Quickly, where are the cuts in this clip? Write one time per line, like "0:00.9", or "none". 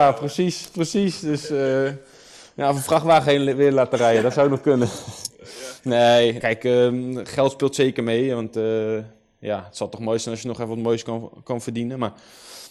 0:06.4